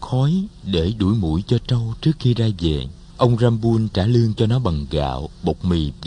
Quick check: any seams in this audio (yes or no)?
yes